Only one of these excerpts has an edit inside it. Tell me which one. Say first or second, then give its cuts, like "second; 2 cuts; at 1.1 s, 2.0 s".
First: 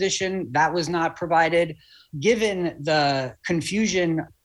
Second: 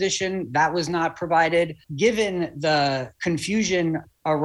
second; 1 cut; at 1.8 s